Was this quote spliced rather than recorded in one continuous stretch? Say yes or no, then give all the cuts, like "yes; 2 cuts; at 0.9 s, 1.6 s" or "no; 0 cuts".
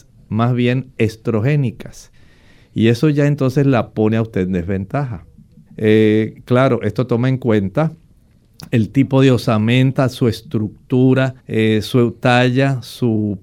yes; 2 cuts; at 5.7 s, 11.4 s